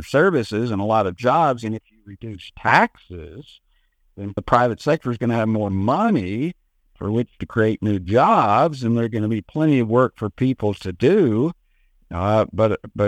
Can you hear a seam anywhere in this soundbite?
yes; 1 cut; at 4.4 s

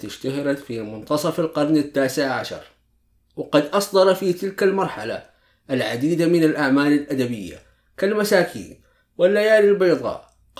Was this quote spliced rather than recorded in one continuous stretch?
no; 0 cuts

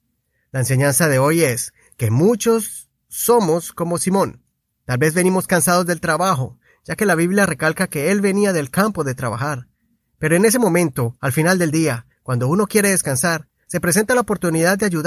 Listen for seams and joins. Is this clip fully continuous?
yes; 0 cuts

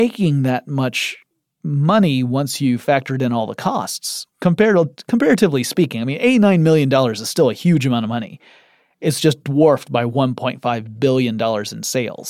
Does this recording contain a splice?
no; 0 cuts

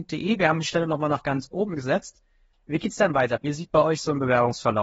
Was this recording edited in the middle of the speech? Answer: yes; 1 cut; at 2.5 s

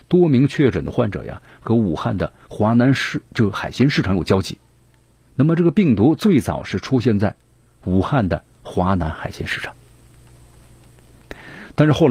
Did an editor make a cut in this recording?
no; 0 cuts

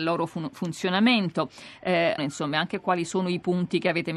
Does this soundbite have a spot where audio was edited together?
yes; 1 cut; at 2.2 s

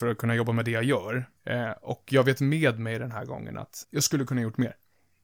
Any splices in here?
yes; 2 cuts; at 1.4 s, 3.8 s

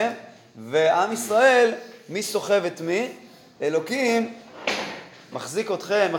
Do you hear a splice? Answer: no; 0 cuts

